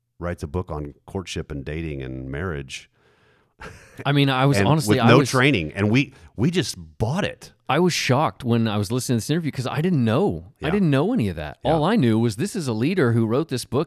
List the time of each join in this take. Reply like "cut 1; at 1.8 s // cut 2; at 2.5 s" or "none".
none